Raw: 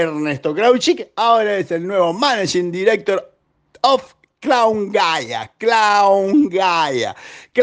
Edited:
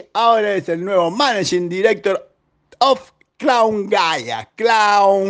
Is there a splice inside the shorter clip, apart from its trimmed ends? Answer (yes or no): no